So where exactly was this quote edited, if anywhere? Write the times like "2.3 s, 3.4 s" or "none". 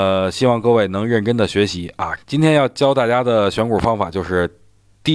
2.2 s